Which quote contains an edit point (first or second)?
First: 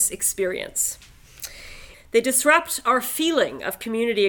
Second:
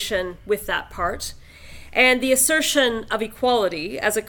first